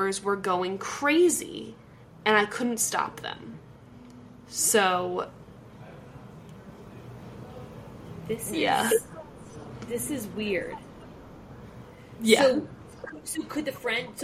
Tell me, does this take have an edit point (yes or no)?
no